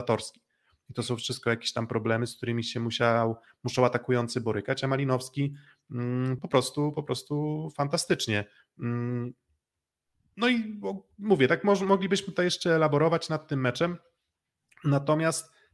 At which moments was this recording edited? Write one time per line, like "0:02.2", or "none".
0:06.4